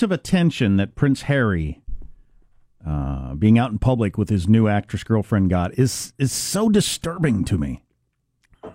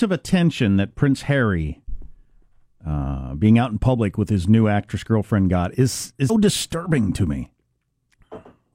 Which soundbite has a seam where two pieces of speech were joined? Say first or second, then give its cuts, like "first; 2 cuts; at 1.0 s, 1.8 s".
second; 1 cut; at 6.3 s